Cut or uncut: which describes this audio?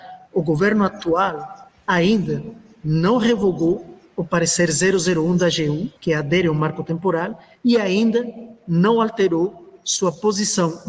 cut